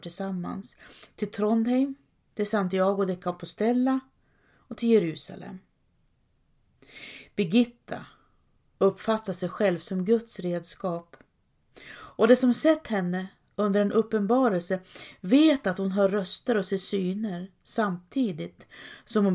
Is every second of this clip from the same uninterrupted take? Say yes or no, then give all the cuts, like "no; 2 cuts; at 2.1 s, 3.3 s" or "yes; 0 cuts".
yes; 0 cuts